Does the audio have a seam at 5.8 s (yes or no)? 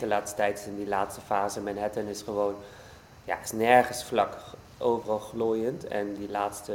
no